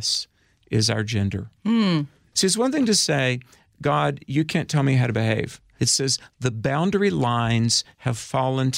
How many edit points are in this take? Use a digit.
2